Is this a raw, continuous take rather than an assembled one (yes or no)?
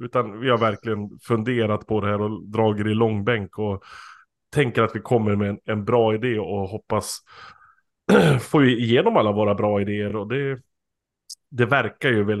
yes